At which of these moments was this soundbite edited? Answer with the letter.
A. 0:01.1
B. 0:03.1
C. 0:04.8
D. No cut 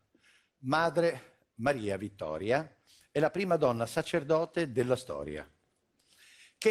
D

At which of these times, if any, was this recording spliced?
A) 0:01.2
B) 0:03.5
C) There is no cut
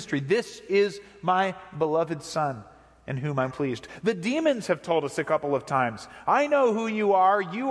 B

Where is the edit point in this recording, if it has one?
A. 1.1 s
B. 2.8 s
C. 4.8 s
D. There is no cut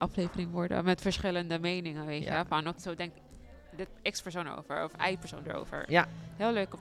B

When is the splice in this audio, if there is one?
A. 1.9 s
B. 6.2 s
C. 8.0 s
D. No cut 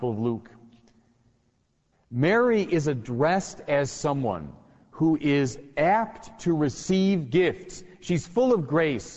A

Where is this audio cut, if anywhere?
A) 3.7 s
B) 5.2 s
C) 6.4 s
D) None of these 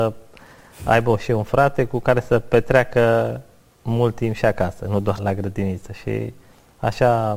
B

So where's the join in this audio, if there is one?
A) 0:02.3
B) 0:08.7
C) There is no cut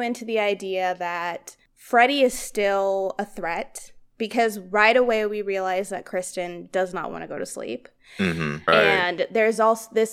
B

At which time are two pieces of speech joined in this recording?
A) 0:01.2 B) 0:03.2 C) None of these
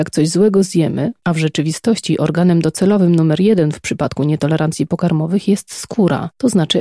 A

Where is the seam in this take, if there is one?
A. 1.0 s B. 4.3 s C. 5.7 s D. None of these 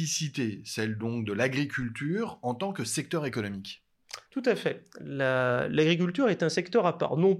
B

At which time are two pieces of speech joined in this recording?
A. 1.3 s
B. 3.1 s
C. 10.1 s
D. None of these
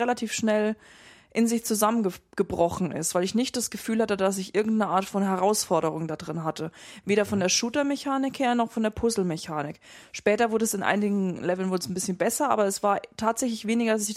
D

